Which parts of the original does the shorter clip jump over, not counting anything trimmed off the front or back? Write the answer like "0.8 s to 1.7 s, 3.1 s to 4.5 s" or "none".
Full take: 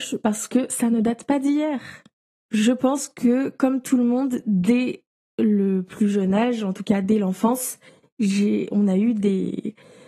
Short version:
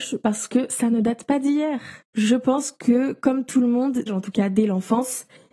2.0 s to 2.4 s, 4.4 s to 6.6 s